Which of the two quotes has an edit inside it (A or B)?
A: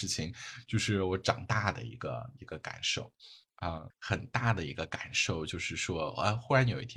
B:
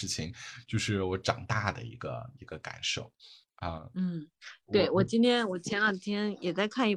A